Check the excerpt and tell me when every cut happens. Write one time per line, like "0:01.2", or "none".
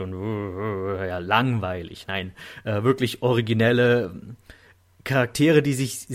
none